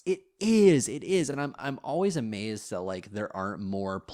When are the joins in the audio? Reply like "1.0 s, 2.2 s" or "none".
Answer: none